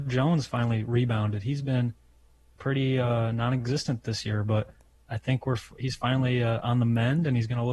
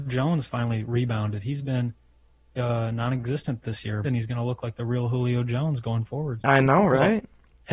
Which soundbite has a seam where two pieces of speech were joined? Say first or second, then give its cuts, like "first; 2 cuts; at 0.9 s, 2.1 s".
second; 3 cuts; at 2.6 s, 4.0 s, 6.4 s